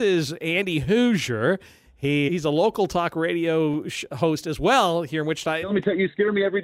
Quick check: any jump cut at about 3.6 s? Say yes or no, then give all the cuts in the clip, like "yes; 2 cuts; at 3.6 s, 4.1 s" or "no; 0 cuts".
no; 2 cuts; at 2.3 s, 5.6 s